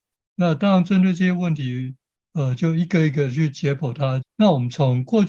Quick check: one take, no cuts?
no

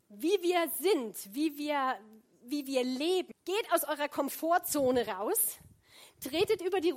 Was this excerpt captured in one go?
no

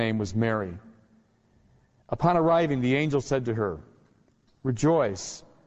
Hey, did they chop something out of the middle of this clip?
no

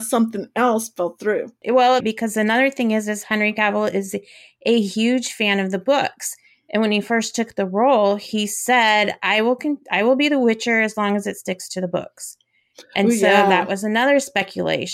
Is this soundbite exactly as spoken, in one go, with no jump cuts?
no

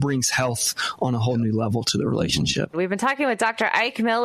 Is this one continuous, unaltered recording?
no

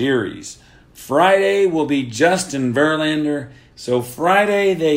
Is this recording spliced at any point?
yes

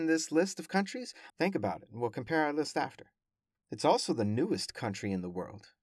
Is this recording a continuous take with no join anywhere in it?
no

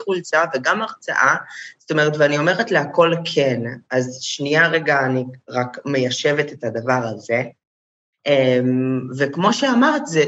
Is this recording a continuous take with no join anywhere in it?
yes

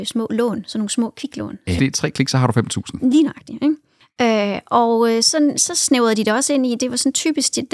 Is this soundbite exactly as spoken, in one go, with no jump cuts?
no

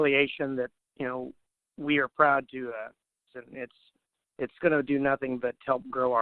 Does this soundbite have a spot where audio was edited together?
yes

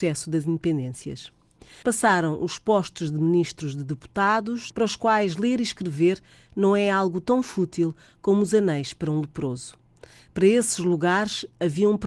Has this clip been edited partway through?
yes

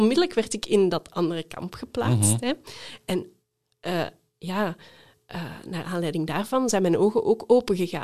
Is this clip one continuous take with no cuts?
yes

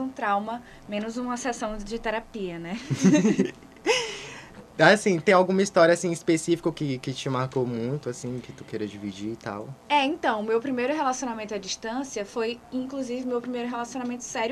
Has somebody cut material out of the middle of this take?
no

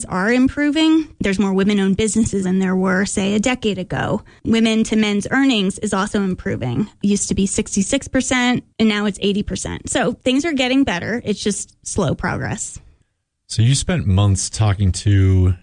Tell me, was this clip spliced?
yes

